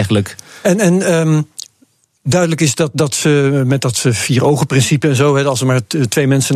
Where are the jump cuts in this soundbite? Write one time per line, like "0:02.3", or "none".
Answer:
none